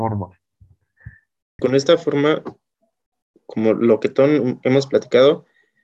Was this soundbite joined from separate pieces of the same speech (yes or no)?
yes